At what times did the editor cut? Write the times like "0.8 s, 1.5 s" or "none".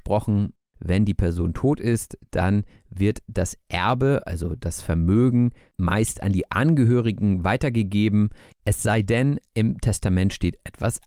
none